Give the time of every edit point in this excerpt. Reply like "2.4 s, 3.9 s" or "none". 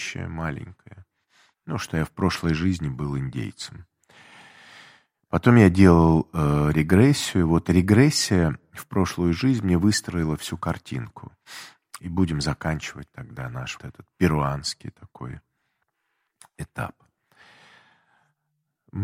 12.0 s, 13.8 s